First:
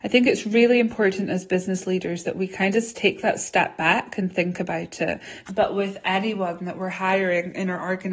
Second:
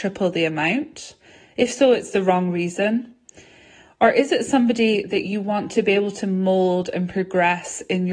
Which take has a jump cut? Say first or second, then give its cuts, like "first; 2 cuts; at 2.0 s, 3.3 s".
first; 1 cut; at 5.5 s